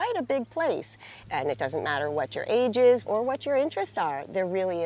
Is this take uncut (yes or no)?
no